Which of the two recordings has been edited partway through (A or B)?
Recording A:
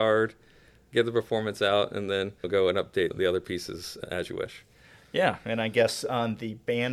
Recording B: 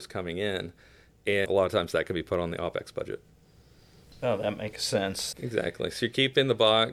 B